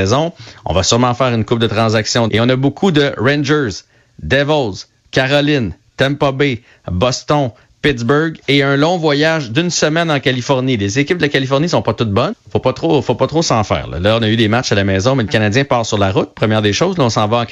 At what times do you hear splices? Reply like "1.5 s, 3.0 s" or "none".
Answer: 2.3 s, 12.3 s